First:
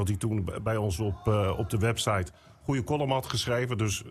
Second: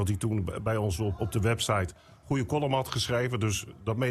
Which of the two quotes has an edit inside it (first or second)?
second